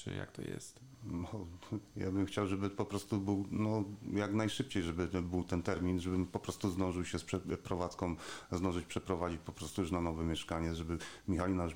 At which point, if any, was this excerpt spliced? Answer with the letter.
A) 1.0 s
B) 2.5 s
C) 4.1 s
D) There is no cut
D